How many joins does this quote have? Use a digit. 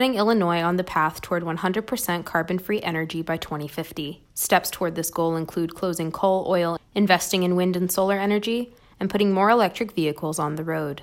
2